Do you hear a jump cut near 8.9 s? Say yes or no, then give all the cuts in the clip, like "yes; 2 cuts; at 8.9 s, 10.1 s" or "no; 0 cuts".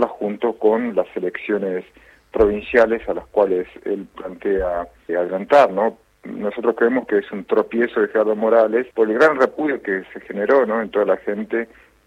yes; 2 cuts; at 5.1 s, 8.9 s